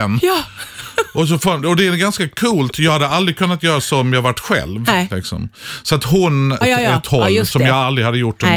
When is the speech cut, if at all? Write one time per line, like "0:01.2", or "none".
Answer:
0:06.6